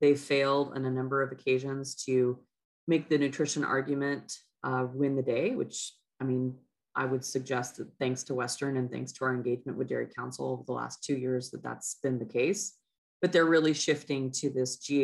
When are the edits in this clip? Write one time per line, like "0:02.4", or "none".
none